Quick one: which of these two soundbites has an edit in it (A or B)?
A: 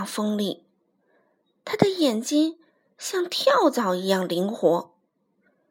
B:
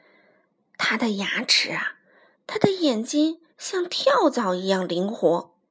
B